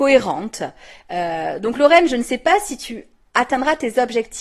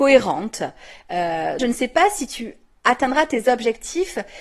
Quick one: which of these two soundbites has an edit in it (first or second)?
second